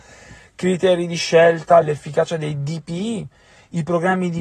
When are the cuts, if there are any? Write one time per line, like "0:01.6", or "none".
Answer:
0:01.8